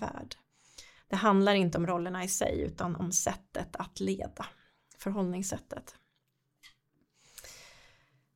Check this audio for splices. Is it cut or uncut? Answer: cut